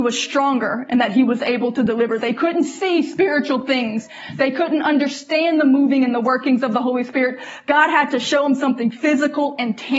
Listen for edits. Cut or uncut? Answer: uncut